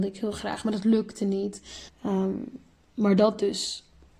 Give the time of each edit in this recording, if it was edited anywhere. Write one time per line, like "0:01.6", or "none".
0:01.9